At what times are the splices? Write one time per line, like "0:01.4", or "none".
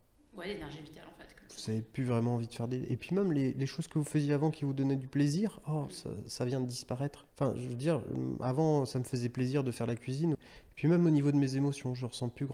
0:07.3
0:10.3